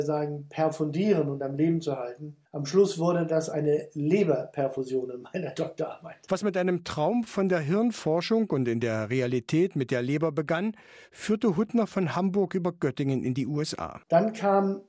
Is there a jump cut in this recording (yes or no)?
yes